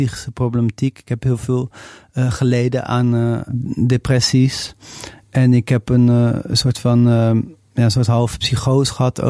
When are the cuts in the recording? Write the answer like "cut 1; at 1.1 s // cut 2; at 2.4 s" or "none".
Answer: none

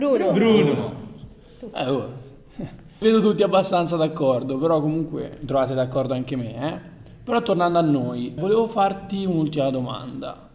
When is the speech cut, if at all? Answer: cut 1; at 3.0 s // cut 2; at 8.4 s

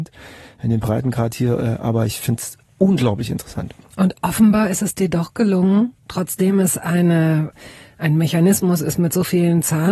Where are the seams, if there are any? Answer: cut 1; at 6.0 s

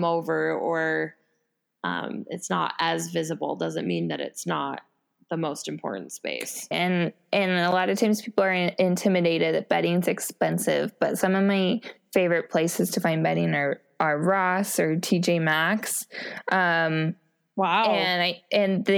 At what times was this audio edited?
cut 1; at 6.7 s

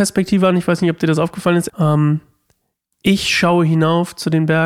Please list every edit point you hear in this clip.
cut 1; at 1.7 s

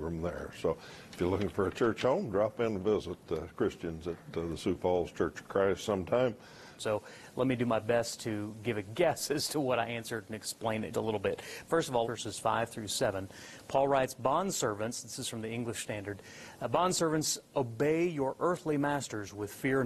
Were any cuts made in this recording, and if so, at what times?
cut 1; at 6.8 s // cut 2; at 10.9 s // cut 3; at 12.0 s

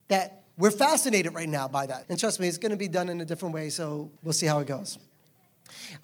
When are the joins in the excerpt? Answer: cut 1; at 2.0 s // cut 2; at 4.2 s

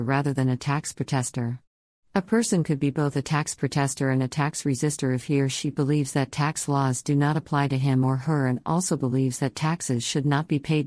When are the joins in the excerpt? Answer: cut 1; at 2.0 s

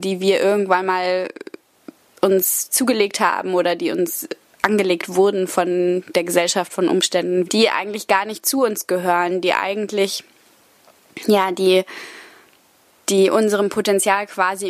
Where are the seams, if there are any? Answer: cut 1; at 7.4 s

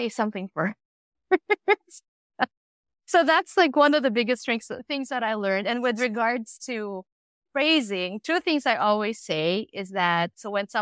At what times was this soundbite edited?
none

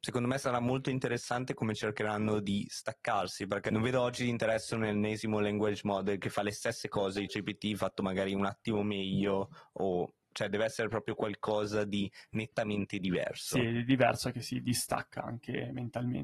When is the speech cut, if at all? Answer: cut 1; at 7.3 s

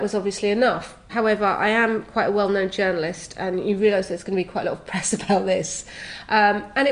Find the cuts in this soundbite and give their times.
cut 1; at 1.1 s

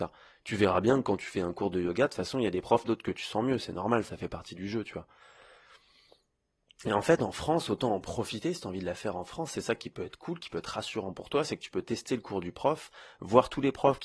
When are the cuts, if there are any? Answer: cut 1; at 2.8 s

